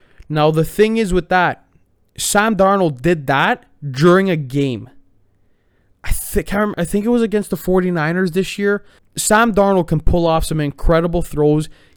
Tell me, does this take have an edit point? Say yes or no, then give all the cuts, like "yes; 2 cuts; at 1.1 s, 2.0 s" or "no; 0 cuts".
yes; 2 cuts; at 6.7 s, 9.0 s